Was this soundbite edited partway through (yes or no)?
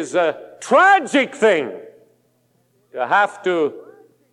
no